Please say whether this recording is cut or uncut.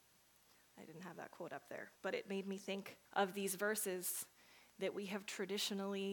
cut